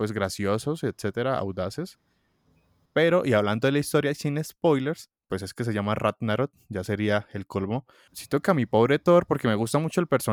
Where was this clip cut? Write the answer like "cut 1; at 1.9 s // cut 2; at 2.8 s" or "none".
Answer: cut 1; at 2.9 s // cut 2; at 8.1 s